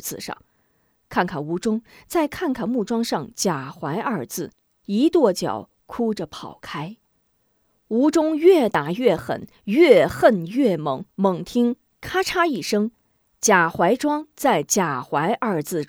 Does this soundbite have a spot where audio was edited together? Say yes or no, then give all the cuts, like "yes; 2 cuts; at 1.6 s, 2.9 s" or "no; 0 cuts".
no; 0 cuts